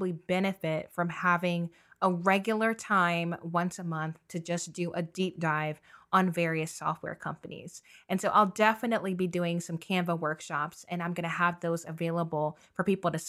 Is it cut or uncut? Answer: uncut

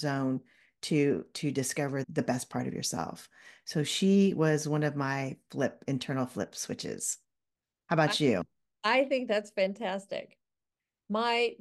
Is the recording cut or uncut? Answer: cut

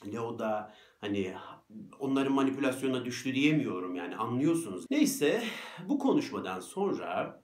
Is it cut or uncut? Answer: cut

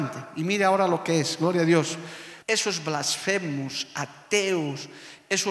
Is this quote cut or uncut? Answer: cut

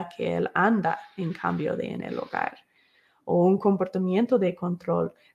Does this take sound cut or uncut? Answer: uncut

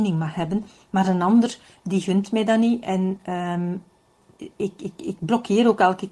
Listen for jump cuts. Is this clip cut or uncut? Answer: uncut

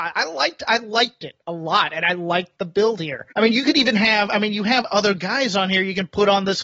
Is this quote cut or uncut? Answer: cut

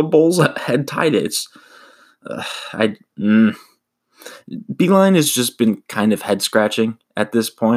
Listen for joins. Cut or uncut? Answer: uncut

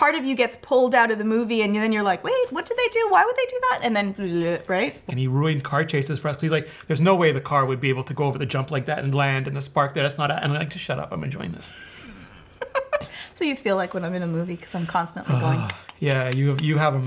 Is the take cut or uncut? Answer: cut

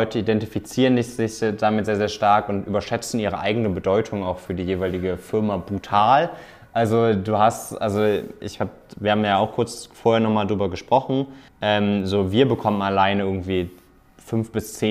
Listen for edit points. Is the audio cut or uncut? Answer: cut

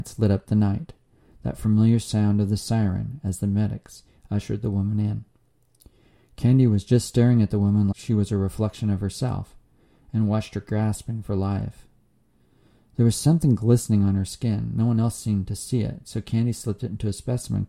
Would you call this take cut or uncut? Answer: cut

